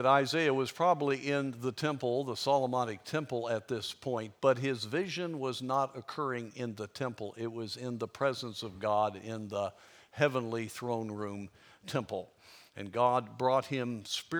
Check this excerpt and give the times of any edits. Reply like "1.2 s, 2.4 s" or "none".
none